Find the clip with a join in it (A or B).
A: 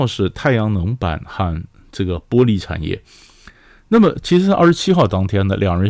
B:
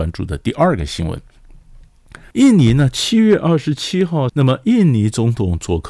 B